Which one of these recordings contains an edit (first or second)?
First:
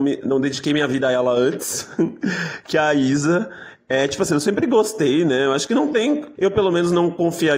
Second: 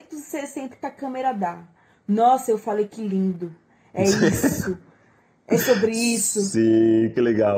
first